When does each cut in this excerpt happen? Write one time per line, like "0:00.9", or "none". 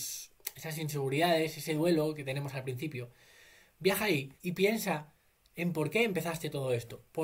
0:04.4